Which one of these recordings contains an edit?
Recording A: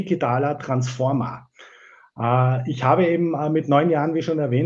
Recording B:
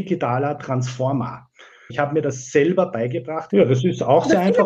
B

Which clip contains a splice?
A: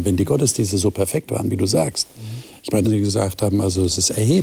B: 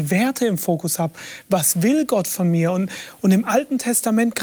A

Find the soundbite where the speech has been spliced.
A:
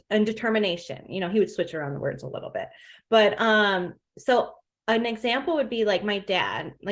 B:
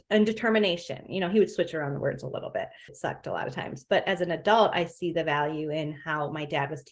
B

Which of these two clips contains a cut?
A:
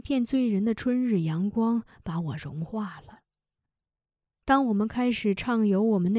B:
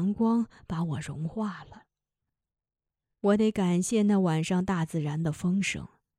A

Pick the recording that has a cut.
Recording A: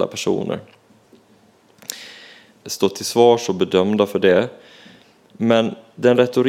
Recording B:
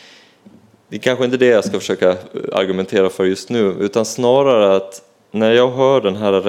A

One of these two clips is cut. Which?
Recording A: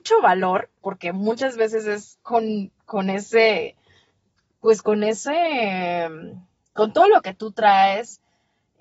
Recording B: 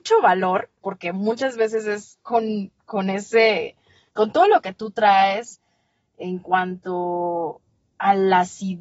B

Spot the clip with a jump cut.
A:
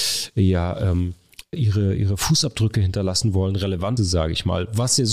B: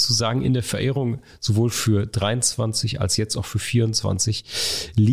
A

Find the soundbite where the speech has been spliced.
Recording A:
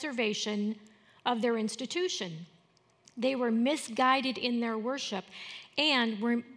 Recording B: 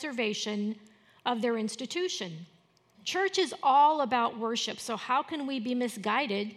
B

